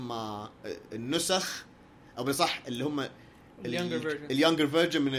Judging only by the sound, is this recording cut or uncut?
uncut